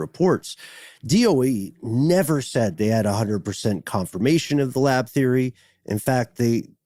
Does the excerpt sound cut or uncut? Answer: uncut